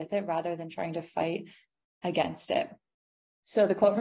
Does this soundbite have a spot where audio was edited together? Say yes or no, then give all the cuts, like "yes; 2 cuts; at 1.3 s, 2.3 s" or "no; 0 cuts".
no; 0 cuts